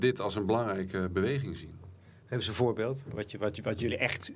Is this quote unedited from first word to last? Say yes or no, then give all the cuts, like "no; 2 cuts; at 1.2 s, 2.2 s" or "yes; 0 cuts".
yes; 0 cuts